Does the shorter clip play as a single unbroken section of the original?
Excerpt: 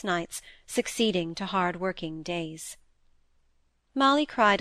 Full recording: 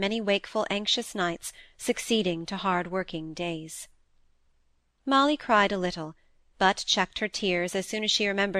yes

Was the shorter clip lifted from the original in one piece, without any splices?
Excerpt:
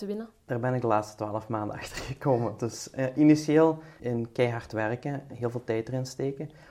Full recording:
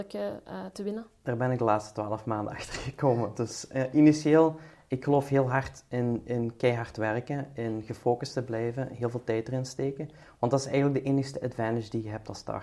no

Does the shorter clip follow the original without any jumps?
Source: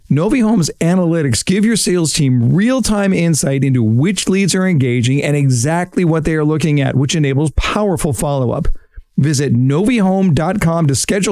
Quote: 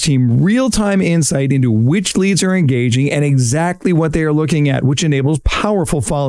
yes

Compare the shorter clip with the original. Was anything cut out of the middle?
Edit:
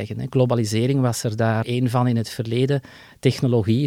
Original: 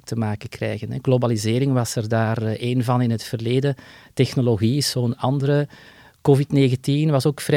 yes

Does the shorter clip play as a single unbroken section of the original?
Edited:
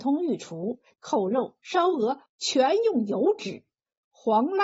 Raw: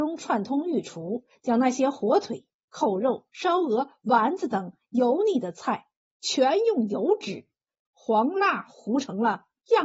no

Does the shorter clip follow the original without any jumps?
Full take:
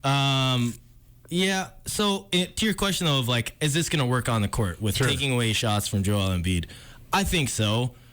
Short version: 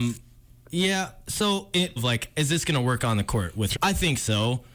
no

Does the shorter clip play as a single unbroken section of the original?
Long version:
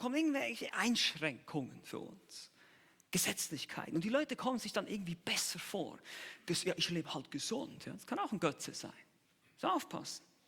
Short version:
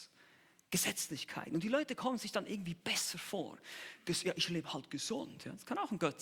yes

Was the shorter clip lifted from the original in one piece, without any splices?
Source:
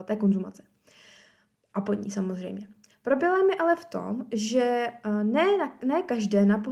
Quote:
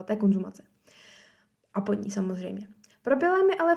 yes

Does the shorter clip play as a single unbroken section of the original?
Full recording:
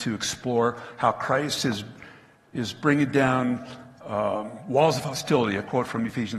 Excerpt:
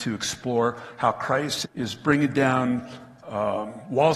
no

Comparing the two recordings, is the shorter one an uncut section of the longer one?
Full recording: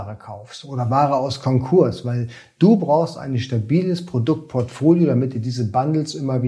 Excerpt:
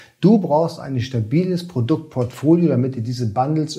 yes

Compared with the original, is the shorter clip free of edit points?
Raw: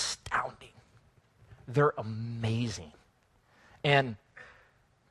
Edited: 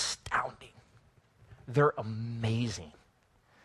yes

